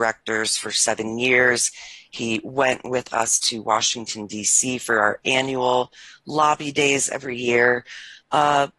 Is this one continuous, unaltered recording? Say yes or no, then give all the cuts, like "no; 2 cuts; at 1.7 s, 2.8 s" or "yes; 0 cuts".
yes; 0 cuts